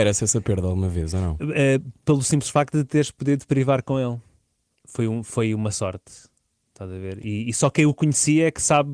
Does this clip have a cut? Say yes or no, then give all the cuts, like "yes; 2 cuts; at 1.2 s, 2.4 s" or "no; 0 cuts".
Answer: no; 0 cuts